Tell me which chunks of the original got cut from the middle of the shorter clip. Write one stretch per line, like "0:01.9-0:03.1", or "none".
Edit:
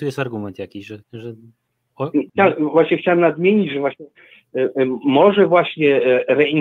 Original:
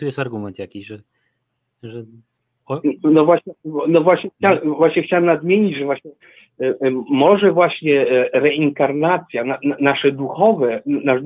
0:01.0-0:01.7
0:03.0-0:04.3